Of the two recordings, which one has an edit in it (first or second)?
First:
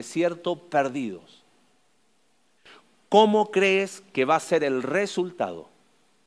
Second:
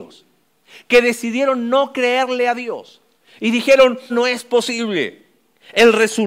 second